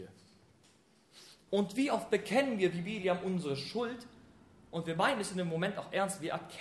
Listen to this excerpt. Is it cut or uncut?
cut